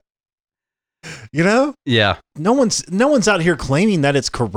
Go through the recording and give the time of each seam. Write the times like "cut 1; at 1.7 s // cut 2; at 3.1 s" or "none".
cut 1; at 2.3 s